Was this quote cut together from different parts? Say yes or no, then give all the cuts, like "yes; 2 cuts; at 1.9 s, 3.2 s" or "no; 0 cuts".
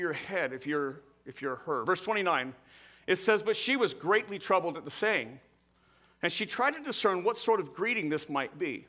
no; 0 cuts